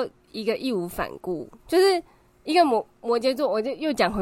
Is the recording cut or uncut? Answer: uncut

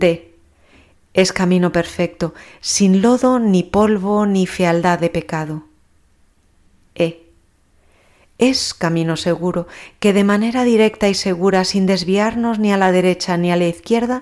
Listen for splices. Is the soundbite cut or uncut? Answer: uncut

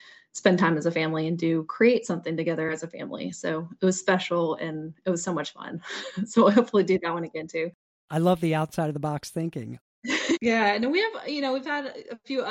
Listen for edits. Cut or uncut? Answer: cut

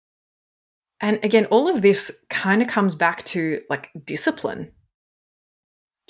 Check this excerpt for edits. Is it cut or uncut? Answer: uncut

